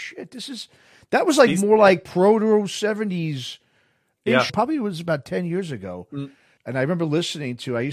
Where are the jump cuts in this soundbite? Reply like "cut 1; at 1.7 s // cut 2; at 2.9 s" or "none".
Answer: cut 1; at 4.5 s // cut 2; at 6.6 s